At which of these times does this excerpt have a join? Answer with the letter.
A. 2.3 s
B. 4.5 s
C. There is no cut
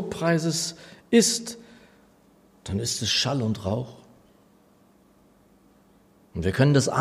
C